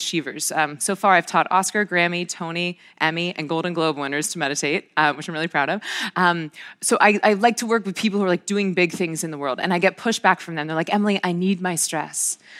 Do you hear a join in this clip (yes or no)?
no